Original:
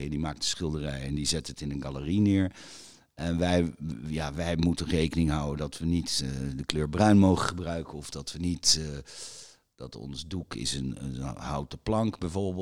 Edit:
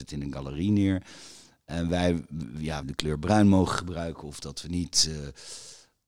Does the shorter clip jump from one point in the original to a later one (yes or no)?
yes